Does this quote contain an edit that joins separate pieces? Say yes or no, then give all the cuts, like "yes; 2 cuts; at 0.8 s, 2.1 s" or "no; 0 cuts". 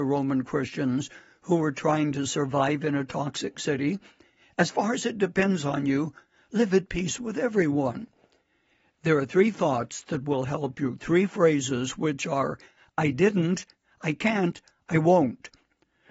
no; 0 cuts